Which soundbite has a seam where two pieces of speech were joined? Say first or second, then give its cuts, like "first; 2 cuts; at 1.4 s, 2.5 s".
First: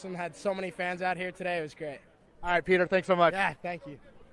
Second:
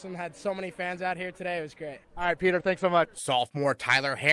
second; 2 cuts; at 2.0 s, 3.0 s